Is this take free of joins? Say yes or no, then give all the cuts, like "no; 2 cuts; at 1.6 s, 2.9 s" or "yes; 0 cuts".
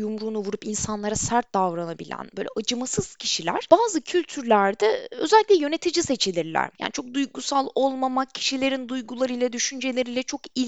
no; 1 cut; at 6.7 s